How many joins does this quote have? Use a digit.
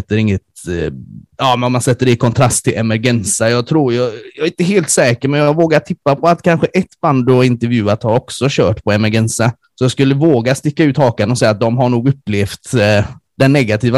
0